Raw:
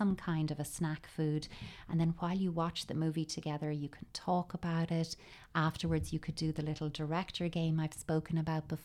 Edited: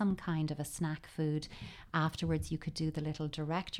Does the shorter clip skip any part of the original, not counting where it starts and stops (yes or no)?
yes